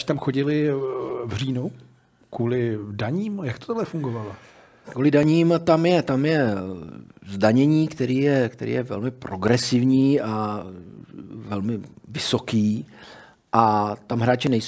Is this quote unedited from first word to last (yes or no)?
no